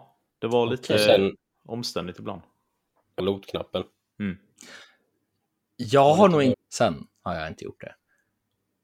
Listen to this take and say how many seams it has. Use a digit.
2